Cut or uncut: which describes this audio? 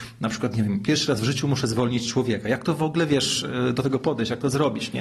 uncut